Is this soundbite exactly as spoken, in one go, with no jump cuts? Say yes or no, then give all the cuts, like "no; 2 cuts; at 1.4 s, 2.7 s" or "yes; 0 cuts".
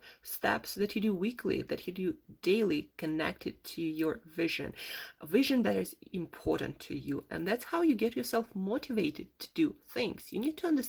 no; 1 cut; at 6.1 s